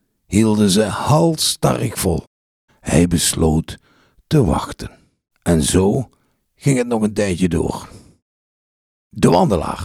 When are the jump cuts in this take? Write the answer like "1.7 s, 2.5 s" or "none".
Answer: 2.7 s, 5.3 s